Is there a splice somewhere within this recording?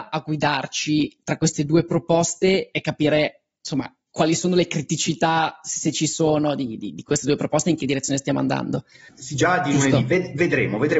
yes; 2 cuts; at 6.8 s, 9.1 s

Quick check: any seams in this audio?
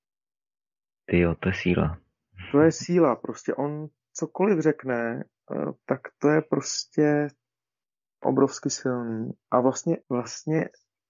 yes; 1 cut; at 10.0 s

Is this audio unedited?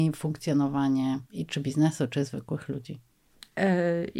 no; 1 cut; at 1.3 s

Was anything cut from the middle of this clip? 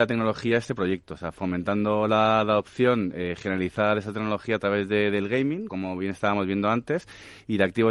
yes; 1 cut; at 5.7 s

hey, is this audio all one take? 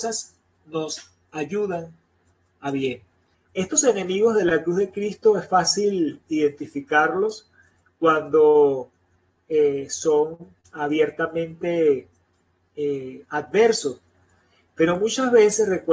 no; 1 cut; at 3.3 s

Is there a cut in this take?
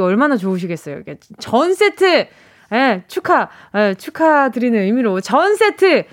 no; 0 cuts

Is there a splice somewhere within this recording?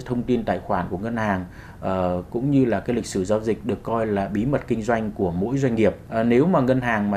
no; 0 cuts

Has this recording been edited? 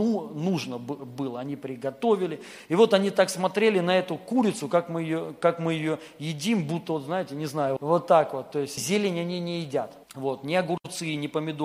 yes; 3 cuts; at 7.8 s, 8.8 s, 10.0 s

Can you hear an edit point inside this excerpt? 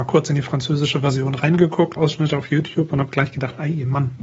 yes; 1 cut; at 2.0 s

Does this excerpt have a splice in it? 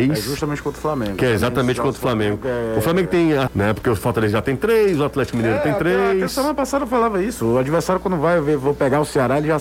yes; 1 cut; at 3.5 s

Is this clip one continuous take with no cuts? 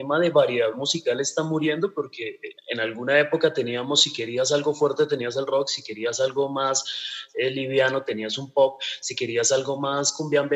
no; 1 cut; at 2.6 s

